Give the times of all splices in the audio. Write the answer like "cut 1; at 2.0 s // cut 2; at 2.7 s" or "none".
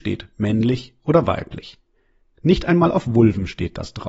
none